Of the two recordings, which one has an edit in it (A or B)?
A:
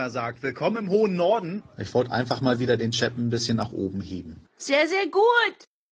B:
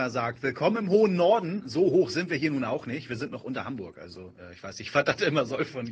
A